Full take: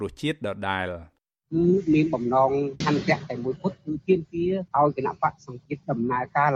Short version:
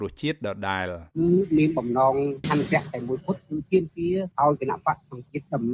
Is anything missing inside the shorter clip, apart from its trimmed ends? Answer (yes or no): yes